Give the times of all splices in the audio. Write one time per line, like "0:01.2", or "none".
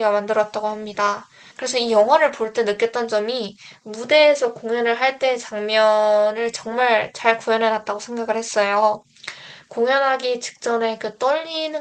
0:01.5